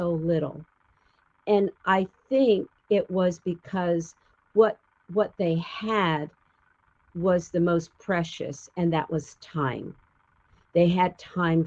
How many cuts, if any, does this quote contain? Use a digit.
0